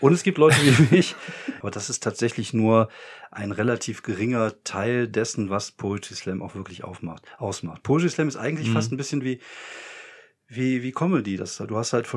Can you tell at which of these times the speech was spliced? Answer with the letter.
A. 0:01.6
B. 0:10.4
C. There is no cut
A